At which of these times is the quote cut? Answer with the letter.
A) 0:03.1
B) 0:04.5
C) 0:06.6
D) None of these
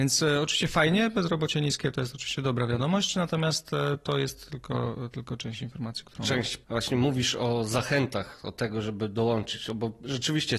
C